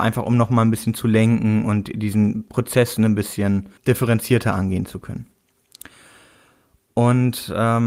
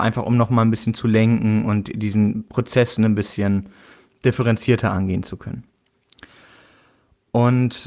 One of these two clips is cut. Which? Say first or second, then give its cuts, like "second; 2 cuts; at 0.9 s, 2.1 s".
first; 1 cut; at 3.8 s